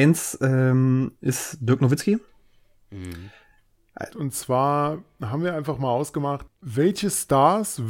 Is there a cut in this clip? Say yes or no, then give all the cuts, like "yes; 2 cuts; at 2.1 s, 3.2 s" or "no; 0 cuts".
yes; 1 cut; at 4.1 s